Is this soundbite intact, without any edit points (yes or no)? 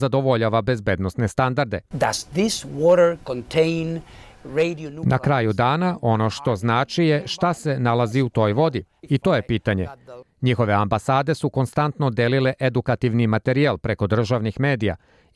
no